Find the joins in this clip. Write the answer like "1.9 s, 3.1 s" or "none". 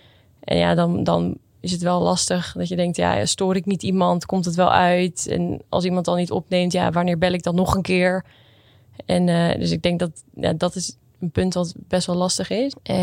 none